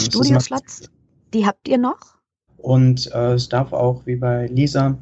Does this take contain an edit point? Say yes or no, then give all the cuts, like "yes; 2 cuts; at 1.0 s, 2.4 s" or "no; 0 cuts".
yes; 1 cut; at 2.5 s